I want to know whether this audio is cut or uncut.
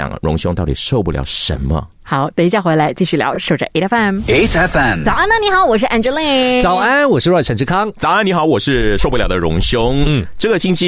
uncut